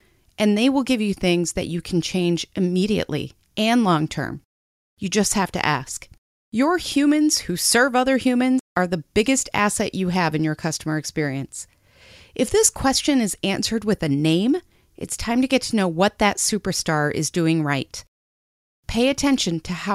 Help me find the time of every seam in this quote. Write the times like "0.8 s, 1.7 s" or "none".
6.3 s